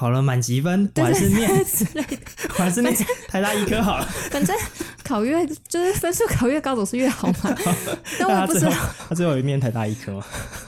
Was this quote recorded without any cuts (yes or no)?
yes